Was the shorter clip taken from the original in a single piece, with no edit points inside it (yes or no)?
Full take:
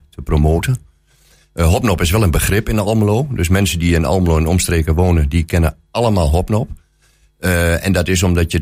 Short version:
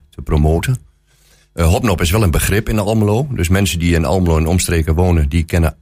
yes